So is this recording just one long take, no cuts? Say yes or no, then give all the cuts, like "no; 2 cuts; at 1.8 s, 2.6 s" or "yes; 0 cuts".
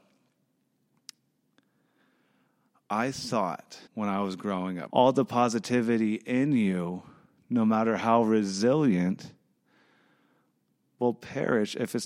no; 2 cuts; at 3.9 s, 4.9 s